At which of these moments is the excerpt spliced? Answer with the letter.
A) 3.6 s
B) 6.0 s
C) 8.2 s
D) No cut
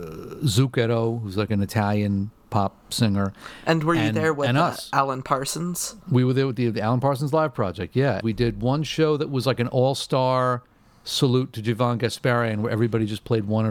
C